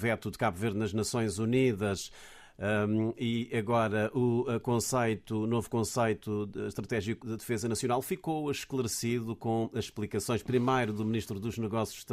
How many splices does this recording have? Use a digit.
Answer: 1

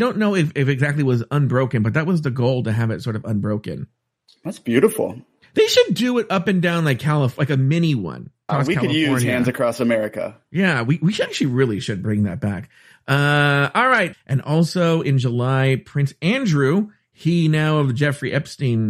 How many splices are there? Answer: 2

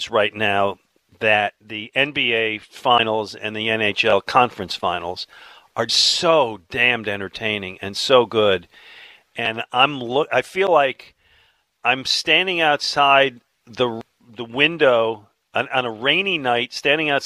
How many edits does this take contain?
1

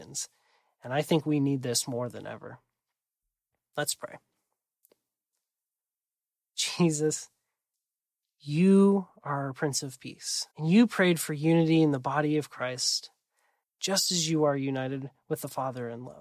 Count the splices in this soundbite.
2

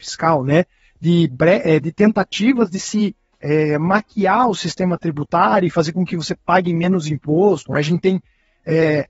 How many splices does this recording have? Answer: 1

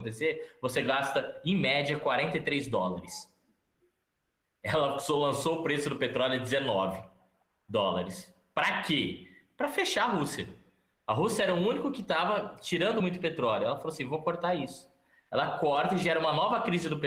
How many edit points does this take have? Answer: 0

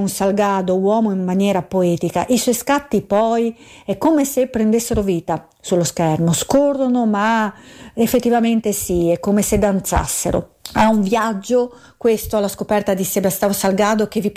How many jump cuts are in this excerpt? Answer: 1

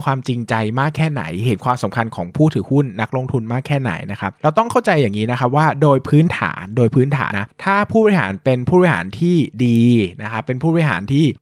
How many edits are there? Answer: 1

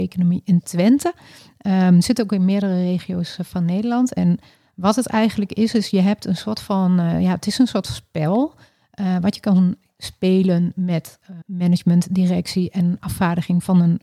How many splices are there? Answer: 2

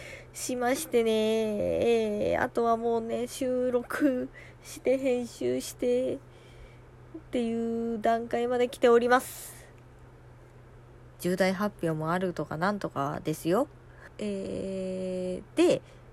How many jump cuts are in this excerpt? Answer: 2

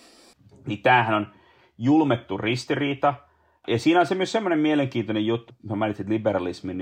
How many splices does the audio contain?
1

